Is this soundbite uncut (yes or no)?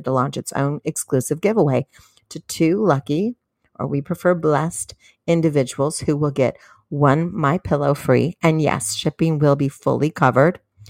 yes